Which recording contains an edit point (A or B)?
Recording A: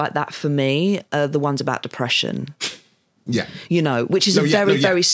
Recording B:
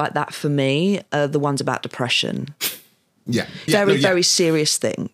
B